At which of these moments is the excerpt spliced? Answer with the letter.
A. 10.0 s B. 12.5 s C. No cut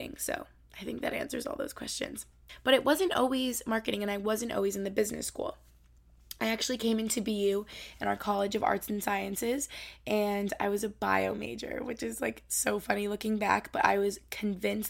C